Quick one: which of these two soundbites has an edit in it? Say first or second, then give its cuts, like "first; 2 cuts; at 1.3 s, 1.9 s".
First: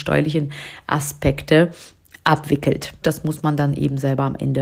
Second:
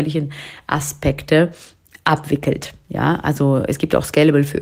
first; 1 cut; at 3.0 s